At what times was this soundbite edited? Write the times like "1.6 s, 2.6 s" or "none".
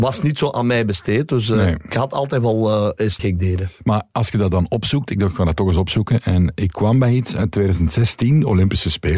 3.2 s

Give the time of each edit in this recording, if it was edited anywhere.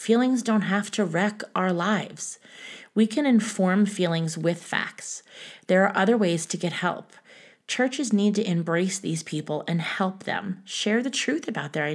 none

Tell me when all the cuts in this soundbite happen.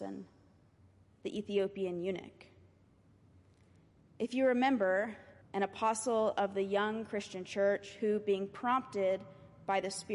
5.4 s

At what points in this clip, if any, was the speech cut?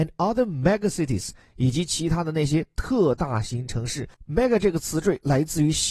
none

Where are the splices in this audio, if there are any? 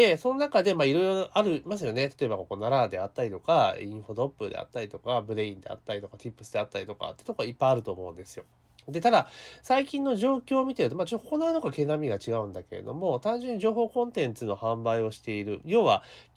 none

